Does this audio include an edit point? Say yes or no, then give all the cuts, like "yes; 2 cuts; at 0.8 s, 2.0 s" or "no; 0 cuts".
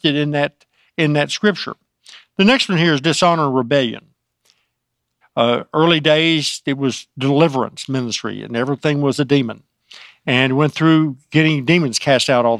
yes; 1 cut; at 5.2 s